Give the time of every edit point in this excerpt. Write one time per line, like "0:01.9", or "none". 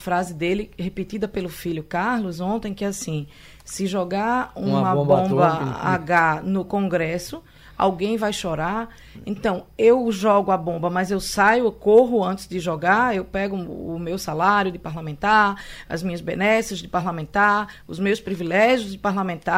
none